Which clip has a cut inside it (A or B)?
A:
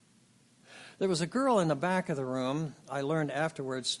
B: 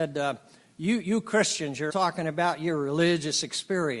B